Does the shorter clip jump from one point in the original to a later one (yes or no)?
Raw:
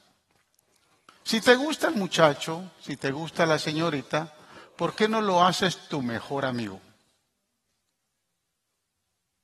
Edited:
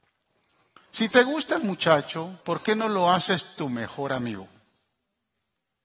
yes